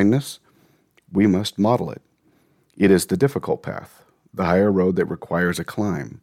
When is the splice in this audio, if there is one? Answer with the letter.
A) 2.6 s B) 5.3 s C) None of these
A